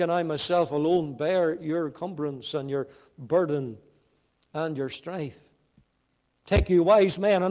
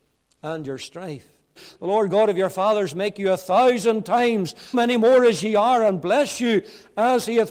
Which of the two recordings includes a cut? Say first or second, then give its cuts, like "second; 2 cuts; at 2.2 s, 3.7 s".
second; 2 cuts; at 1.6 s, 4.7 s